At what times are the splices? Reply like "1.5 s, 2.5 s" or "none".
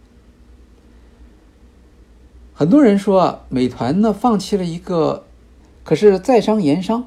5.6 s